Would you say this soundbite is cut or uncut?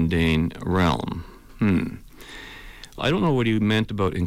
cut